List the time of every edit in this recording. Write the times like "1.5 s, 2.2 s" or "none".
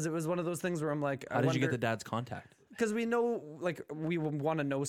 none